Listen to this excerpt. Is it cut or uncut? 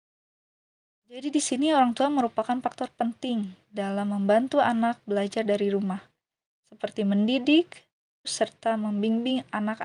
cut